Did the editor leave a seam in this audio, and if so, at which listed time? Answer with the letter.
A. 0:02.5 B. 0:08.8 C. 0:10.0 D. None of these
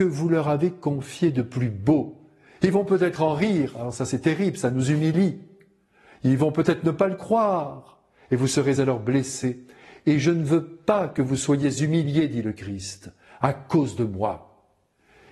D